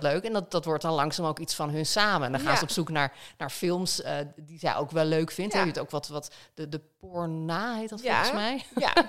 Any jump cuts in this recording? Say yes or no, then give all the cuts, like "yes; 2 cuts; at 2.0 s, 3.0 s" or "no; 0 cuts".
no; 0 cuts